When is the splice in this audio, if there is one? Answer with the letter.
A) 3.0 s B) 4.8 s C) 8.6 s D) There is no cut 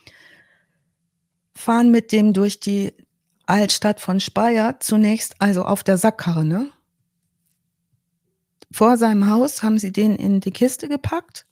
D